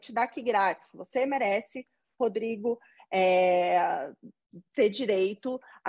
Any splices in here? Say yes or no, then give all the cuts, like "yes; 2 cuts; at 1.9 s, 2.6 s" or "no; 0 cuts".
no; 0 cuts